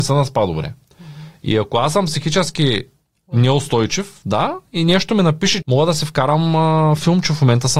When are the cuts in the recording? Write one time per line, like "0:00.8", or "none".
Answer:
0:05.6